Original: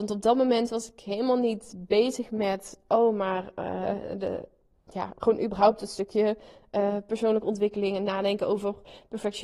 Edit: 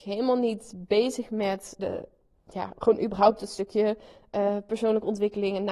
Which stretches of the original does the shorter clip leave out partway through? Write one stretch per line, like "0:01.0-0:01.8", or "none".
0:02.8-0:04.2